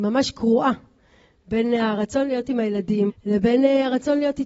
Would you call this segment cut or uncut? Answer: cut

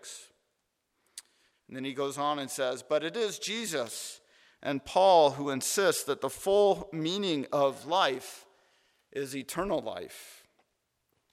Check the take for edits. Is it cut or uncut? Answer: cut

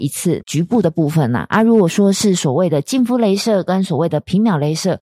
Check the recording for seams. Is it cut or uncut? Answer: uncut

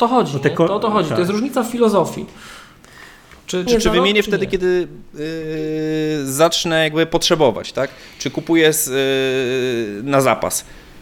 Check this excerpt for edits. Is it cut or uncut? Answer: cut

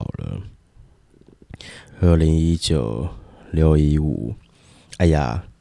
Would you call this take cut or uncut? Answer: cut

